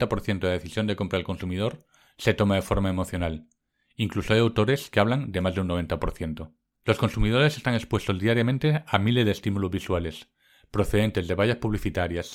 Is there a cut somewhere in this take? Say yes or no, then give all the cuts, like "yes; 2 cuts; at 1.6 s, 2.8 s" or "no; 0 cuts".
yes; 1 cut; at 6.7 s